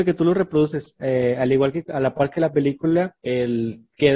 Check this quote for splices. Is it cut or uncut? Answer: cut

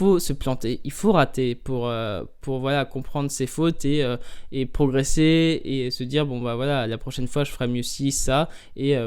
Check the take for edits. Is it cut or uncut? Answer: uncut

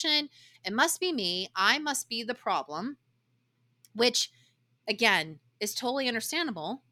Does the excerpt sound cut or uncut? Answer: uncut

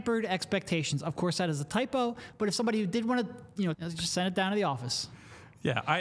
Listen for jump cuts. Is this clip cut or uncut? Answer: cut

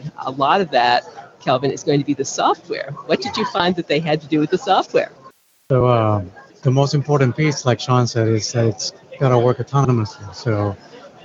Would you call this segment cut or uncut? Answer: uncut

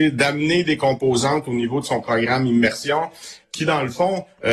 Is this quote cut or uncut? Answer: cut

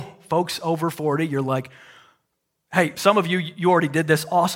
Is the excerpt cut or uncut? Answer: uncut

